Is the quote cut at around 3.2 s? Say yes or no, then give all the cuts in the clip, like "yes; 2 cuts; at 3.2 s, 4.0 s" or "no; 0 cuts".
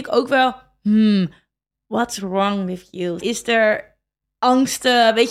yes; 1 cut; at 3.2 s